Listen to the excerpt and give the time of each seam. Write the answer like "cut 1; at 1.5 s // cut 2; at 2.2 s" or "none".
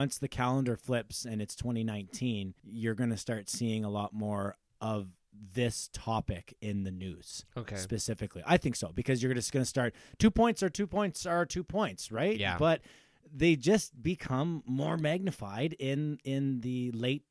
cut 1; at 2.6 s